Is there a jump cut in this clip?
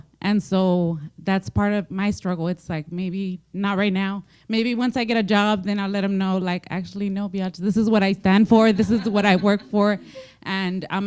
yes; 1 cut; at 1.9 s

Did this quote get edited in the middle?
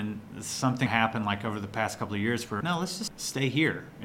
yes; 1 cut; at 2.6 s

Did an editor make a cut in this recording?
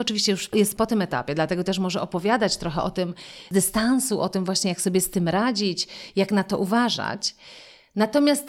no; 0 cuts

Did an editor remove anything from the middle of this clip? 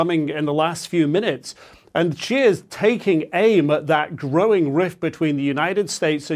no; 0 cuts

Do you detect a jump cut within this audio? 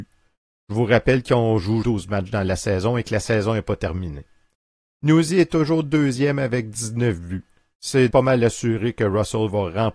yes; 2 cuts; at 1.8 s, 8.1 s

